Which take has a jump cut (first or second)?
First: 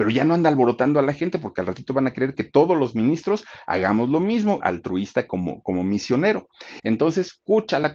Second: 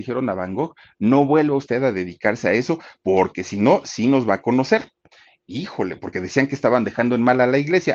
first